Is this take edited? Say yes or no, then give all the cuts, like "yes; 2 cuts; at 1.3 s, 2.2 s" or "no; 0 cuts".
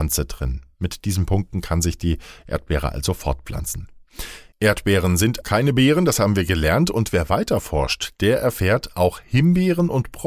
yes; 1 cut; at 5.4 s